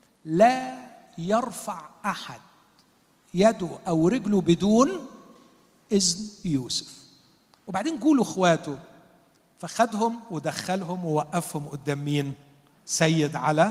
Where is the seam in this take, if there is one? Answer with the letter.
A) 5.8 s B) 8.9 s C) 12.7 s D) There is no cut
C